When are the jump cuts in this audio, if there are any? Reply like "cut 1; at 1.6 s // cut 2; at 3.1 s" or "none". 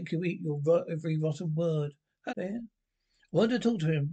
cut 1; at 2.3 s